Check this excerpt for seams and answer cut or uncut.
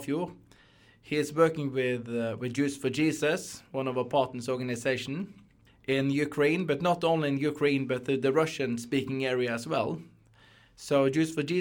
uncut